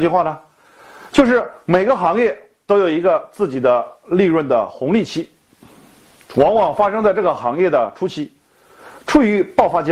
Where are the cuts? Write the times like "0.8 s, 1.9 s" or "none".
none